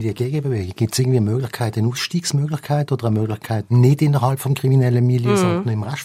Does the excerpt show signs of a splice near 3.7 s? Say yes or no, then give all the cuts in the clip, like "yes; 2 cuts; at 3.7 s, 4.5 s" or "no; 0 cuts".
yes; 1 cut; at 3.7 s